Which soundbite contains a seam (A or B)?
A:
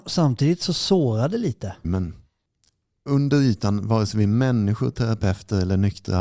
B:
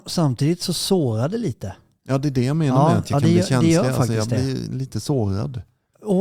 A